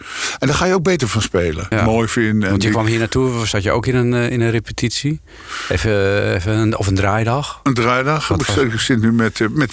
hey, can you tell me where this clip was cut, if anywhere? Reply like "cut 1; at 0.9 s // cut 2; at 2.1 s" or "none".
cut 1; at 1.7 s